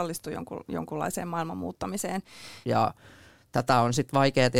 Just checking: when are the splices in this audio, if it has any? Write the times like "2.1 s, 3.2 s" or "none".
2.6 s